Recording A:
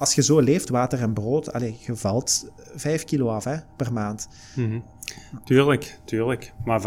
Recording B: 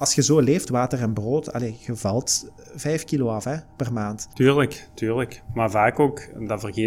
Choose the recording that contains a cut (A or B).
B